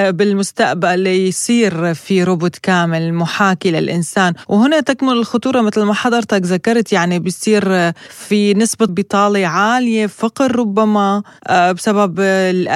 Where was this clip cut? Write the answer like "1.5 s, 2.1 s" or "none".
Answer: 8.9 s